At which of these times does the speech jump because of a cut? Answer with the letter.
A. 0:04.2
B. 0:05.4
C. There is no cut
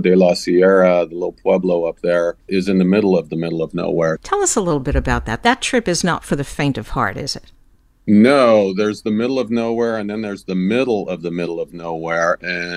A